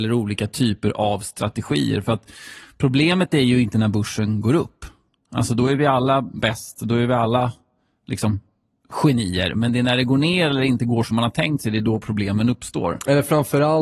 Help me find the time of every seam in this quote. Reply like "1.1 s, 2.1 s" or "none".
none

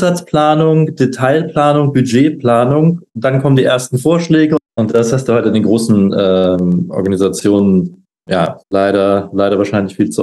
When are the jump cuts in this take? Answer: 8.6 s

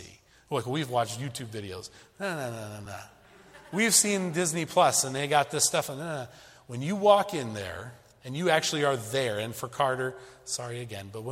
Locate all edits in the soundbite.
none

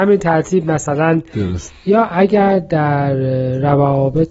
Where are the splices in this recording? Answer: 1.7 s

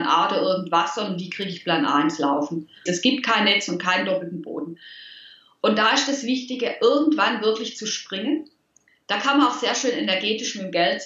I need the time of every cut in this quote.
2.9 s

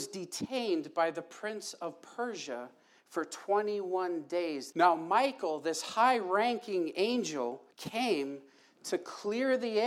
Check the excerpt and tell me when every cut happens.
4.7 s, 7.7 s

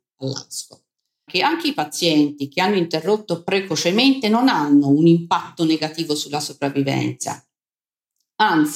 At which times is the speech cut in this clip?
1.3 s

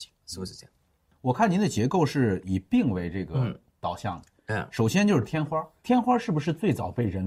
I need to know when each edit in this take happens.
none

